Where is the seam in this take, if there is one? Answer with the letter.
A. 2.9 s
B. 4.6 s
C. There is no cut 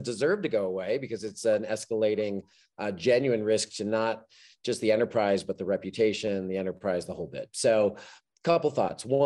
C